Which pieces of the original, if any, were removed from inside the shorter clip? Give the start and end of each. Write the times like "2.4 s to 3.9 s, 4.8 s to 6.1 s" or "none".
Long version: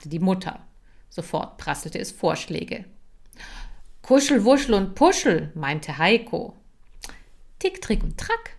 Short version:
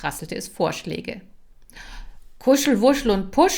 none